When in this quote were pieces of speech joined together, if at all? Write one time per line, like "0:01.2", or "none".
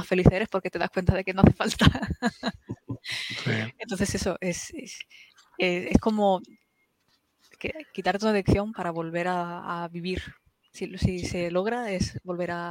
none